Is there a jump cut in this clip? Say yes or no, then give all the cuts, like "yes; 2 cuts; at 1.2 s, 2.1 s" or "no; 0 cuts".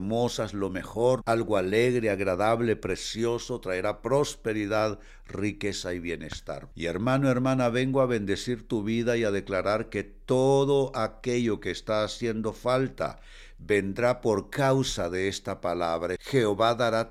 yes; 3 cuts; at 1.2 s, 6.7 s, 16.2 s